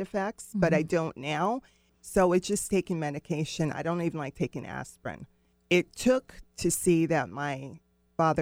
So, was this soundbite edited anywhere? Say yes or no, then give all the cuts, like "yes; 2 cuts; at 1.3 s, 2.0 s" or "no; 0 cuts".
yes; 2 cuts; at 1.9 s, 3.7 s